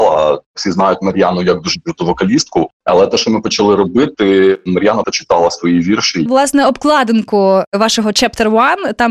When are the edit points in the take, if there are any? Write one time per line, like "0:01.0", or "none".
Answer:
0:05.0
0:06.3